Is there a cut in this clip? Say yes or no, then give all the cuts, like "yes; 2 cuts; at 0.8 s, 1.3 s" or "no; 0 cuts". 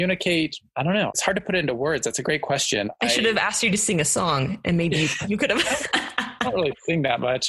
no; 0 cuts